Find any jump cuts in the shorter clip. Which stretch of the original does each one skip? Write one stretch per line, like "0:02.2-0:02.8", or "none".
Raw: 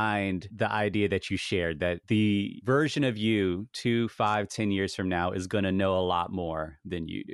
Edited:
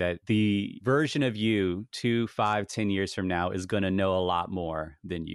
none